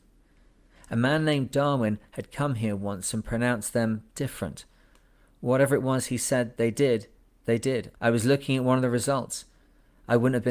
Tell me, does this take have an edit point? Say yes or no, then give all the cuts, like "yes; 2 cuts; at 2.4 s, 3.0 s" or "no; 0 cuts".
yes; 1 cut; at 7.9 s